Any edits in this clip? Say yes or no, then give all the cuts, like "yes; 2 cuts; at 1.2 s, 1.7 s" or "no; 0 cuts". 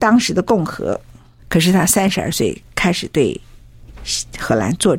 yes; 1 cut; at 1.4 s